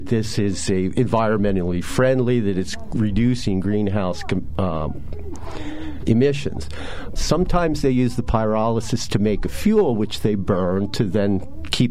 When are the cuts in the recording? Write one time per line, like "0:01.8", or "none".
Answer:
0:07.2